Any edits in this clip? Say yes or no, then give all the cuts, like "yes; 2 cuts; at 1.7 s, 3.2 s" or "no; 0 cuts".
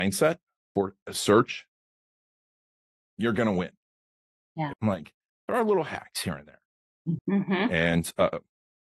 yes; 2 cuts; at 4.7 s, 7.2 s